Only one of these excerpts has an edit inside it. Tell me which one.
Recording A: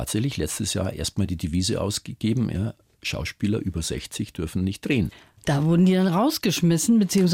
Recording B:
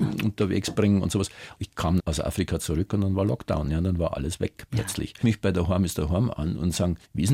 B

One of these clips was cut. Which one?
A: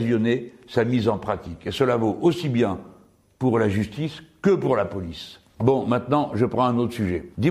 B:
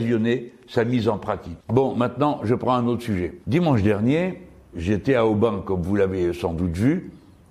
B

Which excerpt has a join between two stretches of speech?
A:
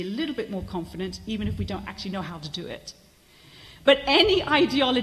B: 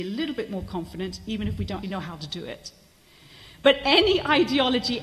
B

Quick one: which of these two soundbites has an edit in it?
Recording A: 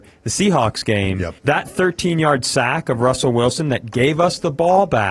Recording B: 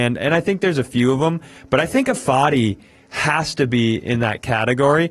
A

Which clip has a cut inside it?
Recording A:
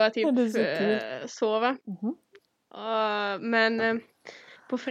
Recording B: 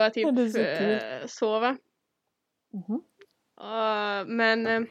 A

